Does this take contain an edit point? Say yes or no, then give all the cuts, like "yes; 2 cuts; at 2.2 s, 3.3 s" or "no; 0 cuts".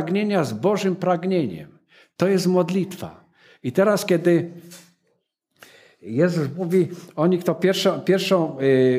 no; 0 cuts